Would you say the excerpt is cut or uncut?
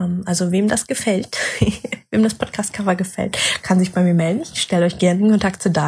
uncut